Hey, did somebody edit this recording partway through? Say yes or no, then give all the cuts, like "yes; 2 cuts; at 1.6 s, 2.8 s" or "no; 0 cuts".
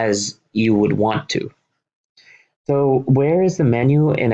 no; 0 cuts